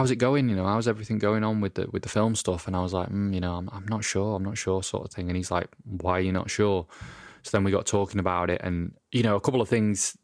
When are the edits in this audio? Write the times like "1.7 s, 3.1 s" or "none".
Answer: none